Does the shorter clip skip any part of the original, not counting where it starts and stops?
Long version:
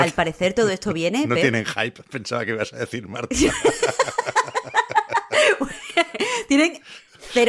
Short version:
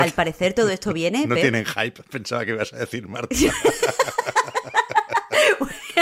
no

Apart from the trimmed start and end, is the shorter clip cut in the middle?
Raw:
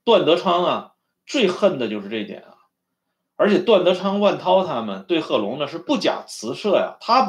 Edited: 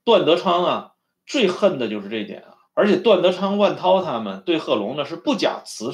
yes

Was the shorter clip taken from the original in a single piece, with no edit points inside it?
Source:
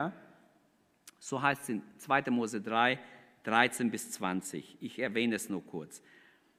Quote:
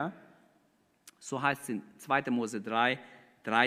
yes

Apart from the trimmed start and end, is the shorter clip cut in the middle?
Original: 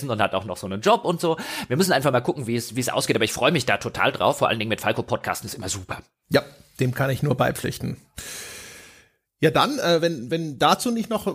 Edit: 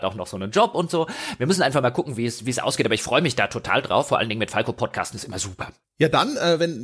yes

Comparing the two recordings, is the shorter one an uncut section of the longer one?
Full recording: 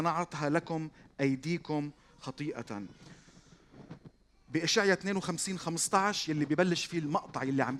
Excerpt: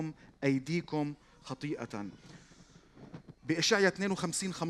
no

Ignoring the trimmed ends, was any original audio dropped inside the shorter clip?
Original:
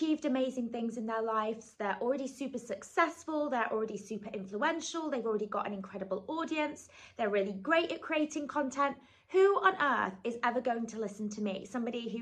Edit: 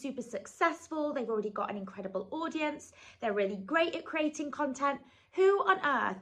yes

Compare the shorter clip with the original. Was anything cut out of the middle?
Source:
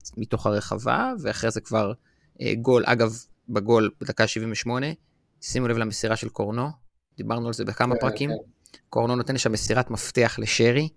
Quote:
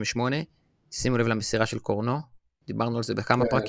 no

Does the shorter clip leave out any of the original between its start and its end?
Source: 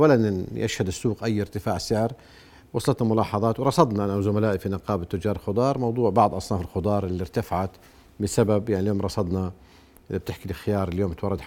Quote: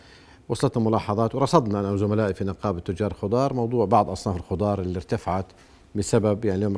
no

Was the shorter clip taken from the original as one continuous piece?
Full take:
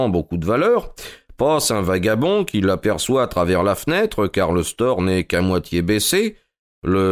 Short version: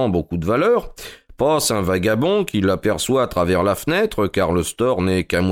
yes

